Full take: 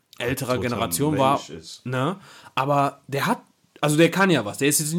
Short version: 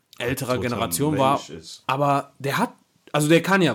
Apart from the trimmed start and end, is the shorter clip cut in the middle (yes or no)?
yes